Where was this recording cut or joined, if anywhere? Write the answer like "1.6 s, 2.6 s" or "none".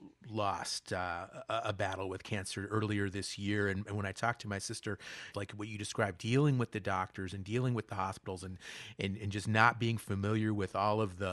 5.3 s